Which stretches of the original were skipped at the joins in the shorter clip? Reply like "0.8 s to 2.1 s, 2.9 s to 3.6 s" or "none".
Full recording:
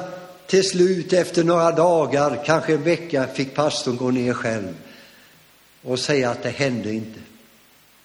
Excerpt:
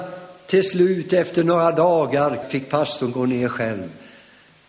2.4 s to 3.3 s